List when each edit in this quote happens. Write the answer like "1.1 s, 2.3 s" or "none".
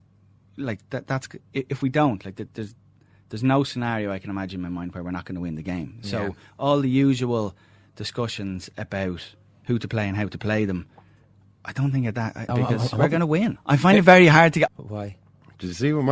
12.5 s, 13.6 s, 14.7 s